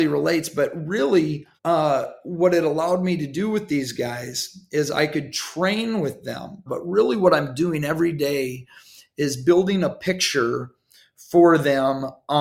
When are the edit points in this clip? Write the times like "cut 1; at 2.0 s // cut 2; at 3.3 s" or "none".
cut 1; at 1.6 s // cut 2; at 6.7 s